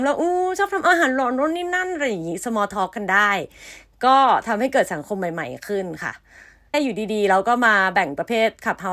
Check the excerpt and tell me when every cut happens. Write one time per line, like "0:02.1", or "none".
0:06.7